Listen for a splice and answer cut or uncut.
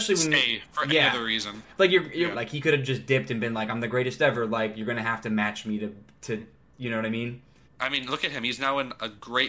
cut